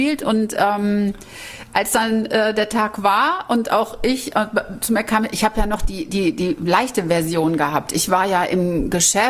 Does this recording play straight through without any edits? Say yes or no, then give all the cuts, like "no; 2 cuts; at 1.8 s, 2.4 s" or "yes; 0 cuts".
yes; 0 cuts